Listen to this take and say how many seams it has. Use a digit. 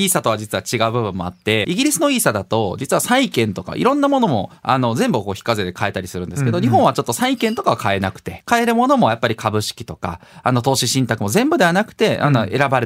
2